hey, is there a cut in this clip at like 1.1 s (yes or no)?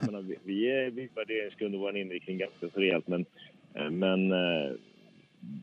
yes